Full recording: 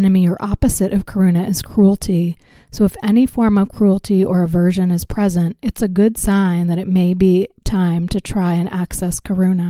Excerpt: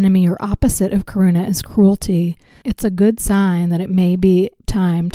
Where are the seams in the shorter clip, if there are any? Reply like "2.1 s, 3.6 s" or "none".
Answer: 2.6 s